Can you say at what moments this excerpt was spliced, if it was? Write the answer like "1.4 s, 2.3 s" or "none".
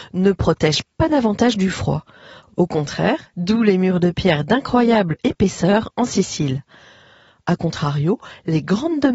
3.3 s